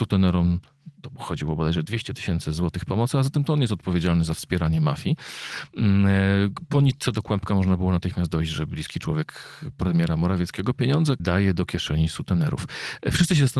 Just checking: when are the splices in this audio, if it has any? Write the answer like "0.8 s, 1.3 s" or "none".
11.2 s